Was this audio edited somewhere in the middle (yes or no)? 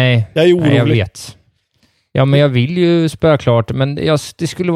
no